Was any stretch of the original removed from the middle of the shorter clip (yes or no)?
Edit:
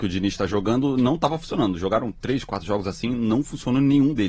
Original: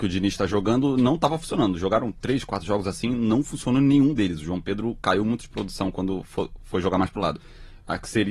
no